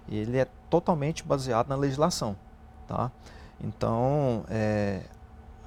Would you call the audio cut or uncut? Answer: uncut